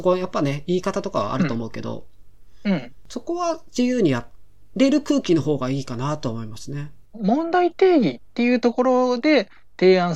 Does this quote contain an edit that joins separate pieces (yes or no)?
yes